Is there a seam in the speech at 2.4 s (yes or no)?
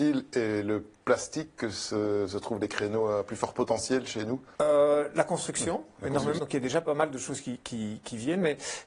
no